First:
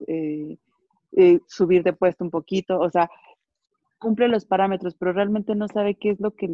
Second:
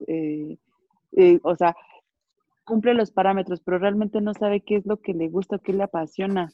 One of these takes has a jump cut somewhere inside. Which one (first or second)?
second